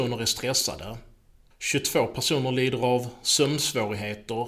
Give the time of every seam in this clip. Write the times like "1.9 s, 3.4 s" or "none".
1.5 s